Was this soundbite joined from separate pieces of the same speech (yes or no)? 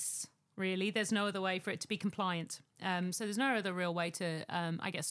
no